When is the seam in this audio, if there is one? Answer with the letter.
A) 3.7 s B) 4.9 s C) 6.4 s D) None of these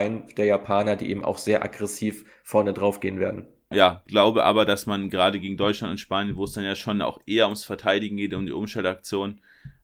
A